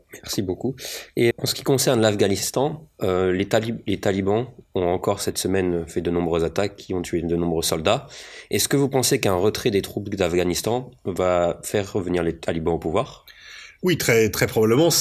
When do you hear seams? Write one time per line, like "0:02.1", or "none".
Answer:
0:01.3